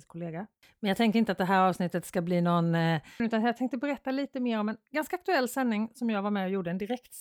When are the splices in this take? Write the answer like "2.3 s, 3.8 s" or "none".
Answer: 3.2 s